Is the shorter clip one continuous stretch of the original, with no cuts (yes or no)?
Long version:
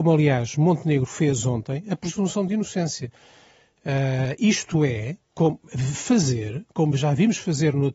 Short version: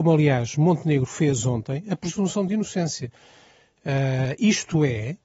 yes